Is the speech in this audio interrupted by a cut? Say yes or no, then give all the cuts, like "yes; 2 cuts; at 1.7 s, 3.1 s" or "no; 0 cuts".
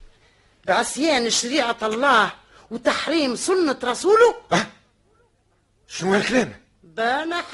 no; 0 cuts